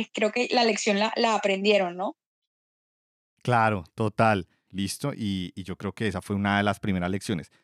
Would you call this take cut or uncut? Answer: cut